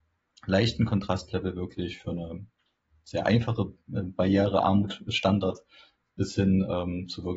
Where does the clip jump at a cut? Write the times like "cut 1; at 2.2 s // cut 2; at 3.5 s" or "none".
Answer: none